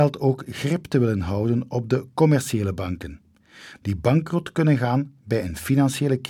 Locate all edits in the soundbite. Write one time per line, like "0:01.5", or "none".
none